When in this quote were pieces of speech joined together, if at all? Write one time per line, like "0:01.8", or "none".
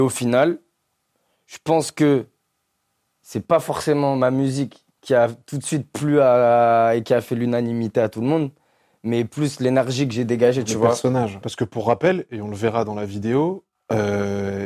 0:04.9
0:11.4
0:13.7